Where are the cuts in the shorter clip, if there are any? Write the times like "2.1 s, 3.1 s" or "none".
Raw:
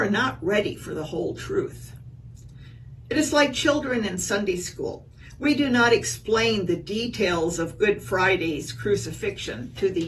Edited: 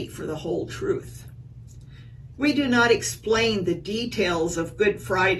2.3 s

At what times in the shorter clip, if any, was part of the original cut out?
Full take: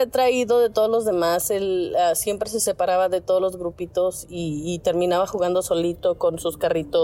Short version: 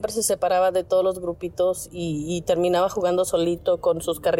none

